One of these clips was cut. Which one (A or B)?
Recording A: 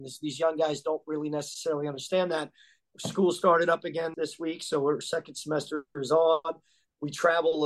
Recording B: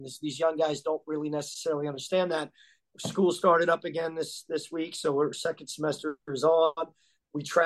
A